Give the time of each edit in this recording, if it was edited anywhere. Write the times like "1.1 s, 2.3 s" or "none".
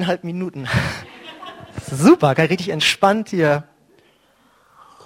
none